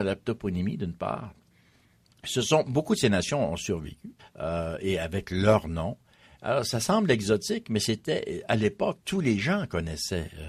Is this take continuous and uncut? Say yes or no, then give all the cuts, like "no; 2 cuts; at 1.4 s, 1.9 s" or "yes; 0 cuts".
no; 1 cut; at 4.2 s